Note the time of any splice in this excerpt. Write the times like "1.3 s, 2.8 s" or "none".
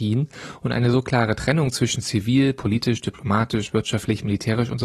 none